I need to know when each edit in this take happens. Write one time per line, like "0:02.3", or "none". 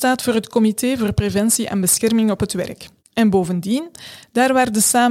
0:03.0

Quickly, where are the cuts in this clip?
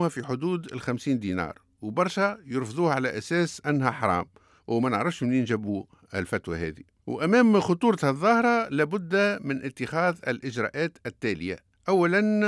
none

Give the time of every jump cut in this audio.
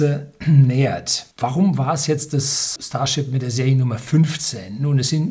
0:01.3
0:02.8

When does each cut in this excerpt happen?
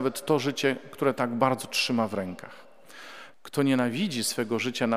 0:03.3

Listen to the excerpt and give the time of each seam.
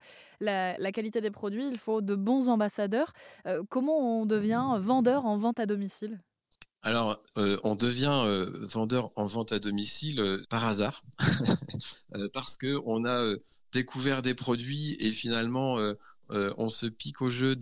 0:10.4

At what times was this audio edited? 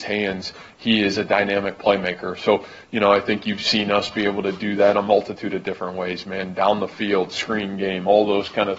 none

